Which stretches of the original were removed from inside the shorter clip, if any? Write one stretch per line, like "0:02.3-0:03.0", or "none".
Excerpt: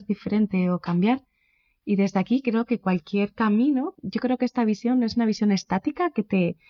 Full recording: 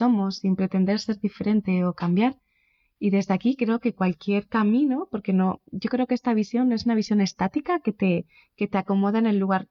0:05.1-0:05.6